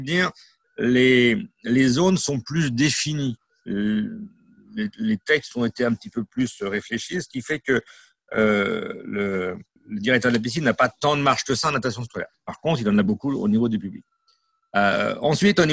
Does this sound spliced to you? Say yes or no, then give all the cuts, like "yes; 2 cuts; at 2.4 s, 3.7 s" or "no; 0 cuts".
yes; 1 cut; at 9.8 s